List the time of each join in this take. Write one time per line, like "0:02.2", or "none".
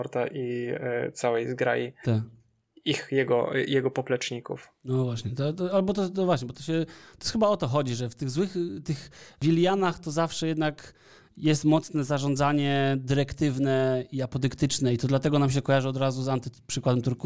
none